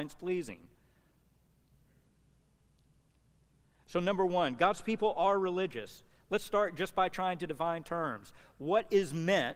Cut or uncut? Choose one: uncut